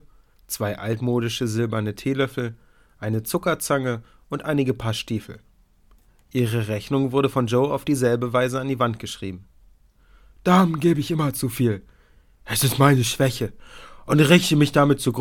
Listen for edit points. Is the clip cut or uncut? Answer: uncut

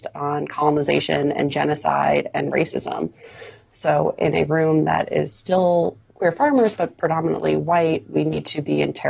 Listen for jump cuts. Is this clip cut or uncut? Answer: uncut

